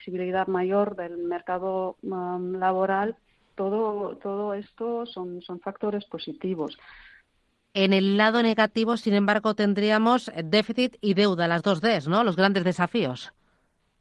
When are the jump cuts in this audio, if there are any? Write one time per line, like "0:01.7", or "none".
none